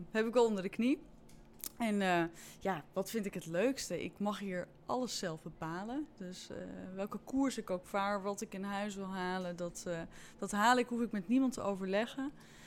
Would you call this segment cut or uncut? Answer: uncut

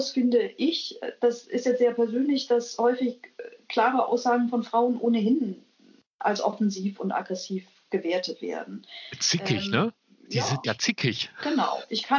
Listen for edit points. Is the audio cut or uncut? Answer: cut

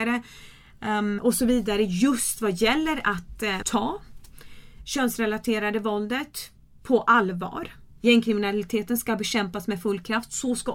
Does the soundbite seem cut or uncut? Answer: cut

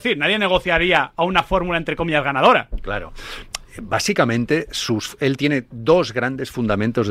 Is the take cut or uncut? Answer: uncut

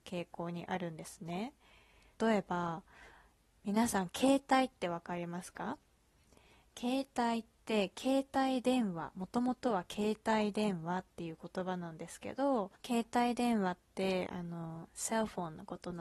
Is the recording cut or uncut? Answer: cut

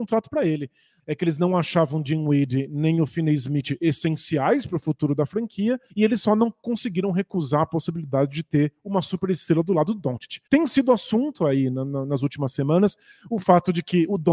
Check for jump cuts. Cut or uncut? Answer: cut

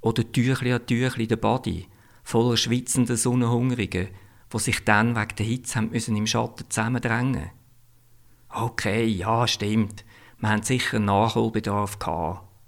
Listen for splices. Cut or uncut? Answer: uncut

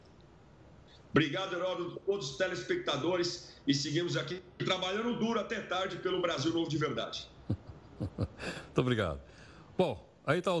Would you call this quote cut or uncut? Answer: uncut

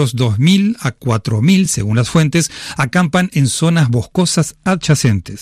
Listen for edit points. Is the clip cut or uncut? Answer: uncut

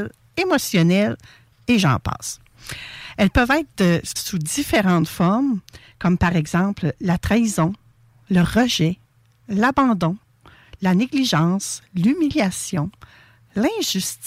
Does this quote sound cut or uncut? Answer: cut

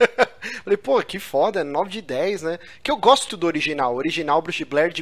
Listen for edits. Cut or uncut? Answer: cut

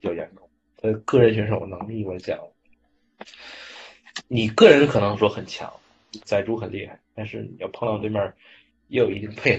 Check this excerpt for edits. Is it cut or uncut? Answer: cut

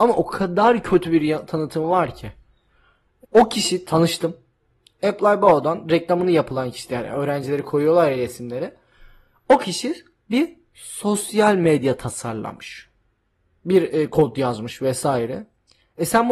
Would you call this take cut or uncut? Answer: cut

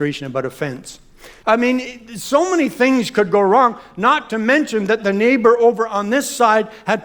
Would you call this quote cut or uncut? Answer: cut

